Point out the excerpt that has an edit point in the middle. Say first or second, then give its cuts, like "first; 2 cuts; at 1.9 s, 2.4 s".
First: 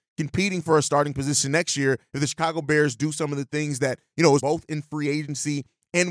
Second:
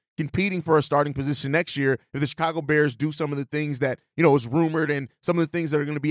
first; 1 cut; at 4.4 s